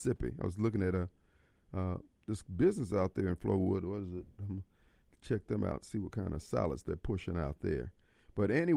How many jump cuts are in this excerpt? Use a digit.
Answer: 1